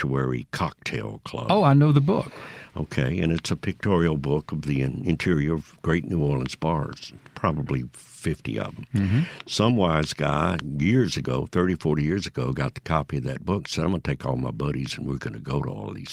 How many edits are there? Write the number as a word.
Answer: zero